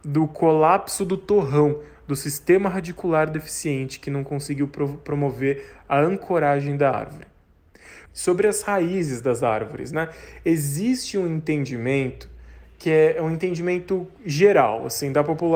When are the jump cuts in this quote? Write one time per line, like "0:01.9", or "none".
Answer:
0:08.1